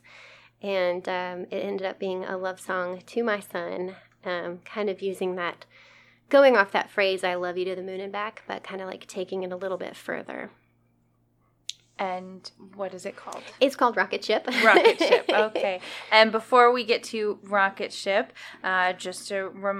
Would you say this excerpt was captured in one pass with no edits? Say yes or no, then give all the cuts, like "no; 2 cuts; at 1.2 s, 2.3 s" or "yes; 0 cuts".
yes; 0 cuts